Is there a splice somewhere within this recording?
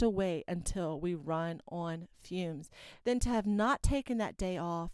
yes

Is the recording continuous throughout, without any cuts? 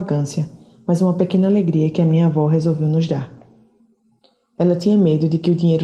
yes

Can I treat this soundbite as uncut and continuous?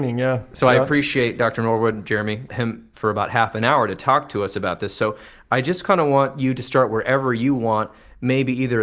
no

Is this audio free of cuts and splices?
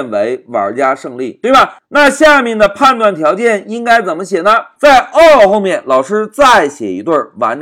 no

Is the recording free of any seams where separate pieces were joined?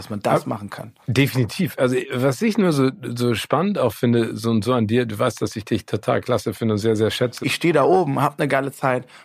no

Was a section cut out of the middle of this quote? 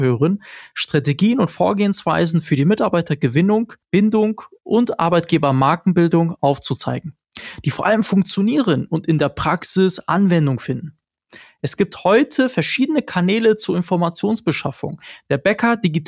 yes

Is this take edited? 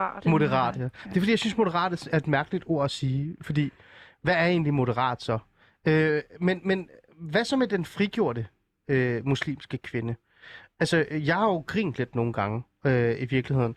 no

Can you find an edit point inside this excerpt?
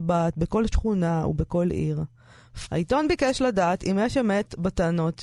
yes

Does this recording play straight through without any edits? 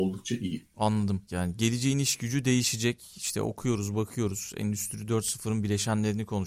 no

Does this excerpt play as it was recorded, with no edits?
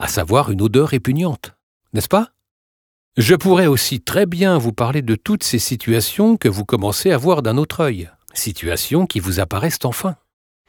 yes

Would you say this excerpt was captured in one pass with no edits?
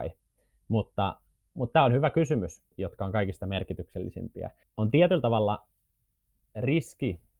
no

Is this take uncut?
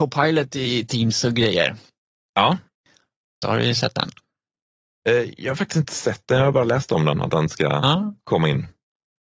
no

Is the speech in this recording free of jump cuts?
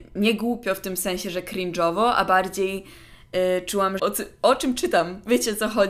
no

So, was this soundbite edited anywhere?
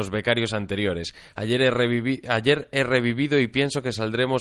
no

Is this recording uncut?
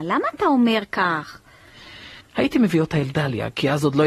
no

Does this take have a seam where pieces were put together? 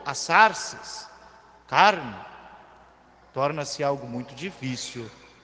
no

